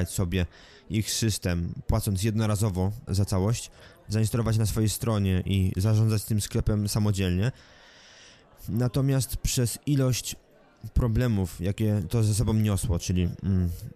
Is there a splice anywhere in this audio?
yes; 1 cut; at 3.1 s

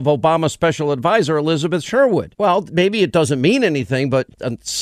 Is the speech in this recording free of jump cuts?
yes; 0 cuts

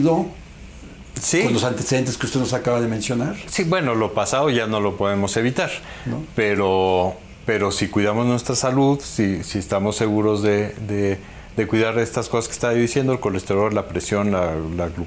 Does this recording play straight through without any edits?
yes; 0 cuts

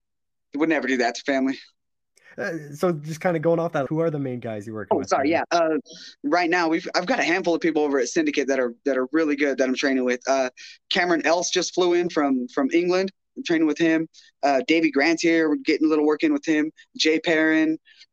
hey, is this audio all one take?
no; 1 cut; at 3.9 s

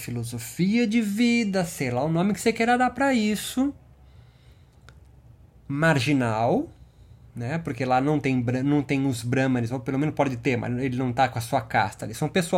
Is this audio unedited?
yes; 0 cuts

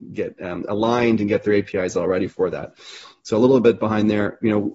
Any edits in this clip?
no; 0 cuts

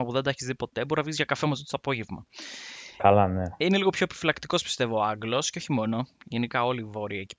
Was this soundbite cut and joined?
no; 0 cuts

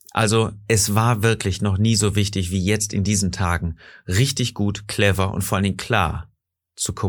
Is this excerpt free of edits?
yes; 0 cuts

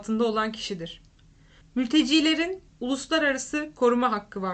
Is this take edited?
yes; 1 cut; at 1.6 s

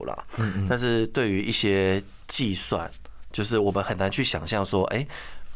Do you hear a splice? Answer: no; 0 cuts

